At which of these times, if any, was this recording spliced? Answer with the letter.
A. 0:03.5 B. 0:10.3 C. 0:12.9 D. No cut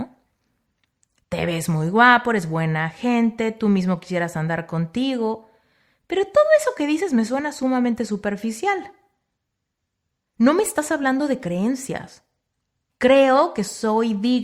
C